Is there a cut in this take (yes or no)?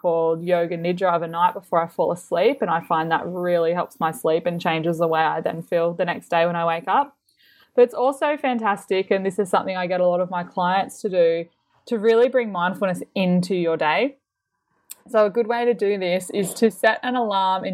no